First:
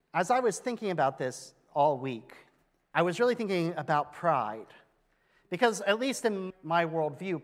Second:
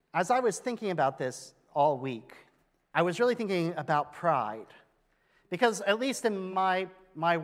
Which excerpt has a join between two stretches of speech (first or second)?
first